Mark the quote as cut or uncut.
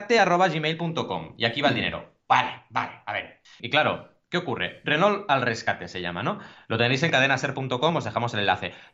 cut